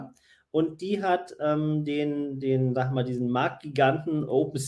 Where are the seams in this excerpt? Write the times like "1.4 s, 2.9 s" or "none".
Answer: none